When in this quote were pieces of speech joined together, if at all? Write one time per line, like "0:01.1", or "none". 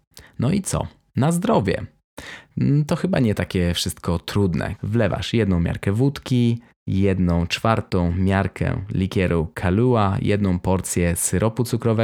0:04.8